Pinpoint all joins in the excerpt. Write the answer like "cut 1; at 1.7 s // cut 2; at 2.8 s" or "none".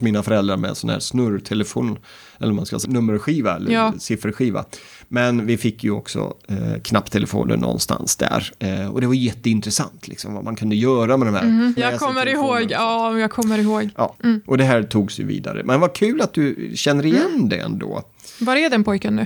cut 1; at 2.8 s // cut 2; at 11.8 s // cut 3; at 14.2 s